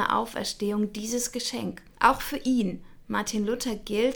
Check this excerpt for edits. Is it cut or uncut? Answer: cut